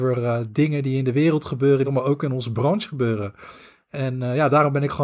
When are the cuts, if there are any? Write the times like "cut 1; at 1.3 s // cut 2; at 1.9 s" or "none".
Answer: cut 1; at 1.8 s